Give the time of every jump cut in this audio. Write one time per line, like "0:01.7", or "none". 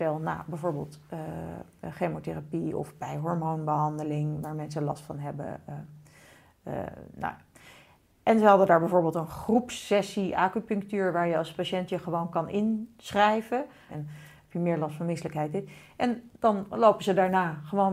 0:13.9